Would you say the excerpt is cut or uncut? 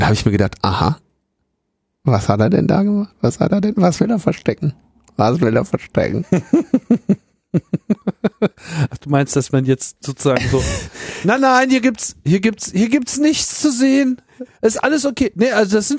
uncut